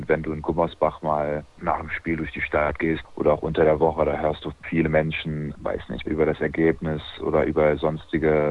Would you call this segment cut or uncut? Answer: cut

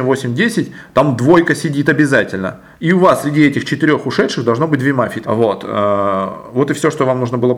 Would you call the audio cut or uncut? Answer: cut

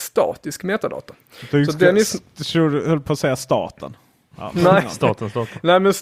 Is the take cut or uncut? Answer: uncut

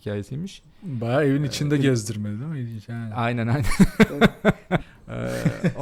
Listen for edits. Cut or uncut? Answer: cut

